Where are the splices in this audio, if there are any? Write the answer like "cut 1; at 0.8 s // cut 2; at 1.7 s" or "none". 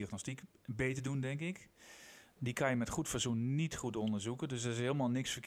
cut 1; at 2.4 s